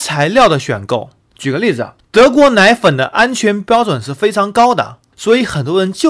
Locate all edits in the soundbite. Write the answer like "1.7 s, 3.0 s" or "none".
2.0 s